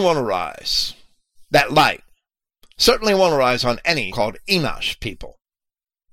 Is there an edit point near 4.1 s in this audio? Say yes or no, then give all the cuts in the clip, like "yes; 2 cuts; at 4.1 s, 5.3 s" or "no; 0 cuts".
yes; 1 cut; at 4.1 s